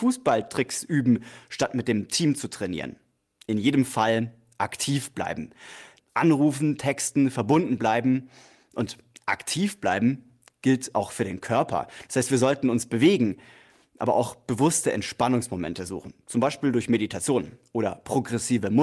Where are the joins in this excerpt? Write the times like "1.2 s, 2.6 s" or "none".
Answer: 6.0 s